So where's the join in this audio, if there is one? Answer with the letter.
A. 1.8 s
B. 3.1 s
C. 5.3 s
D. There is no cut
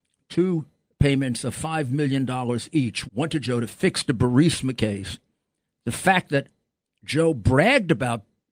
B